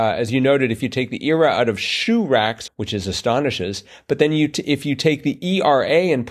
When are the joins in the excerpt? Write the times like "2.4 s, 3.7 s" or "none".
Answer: 2.7 s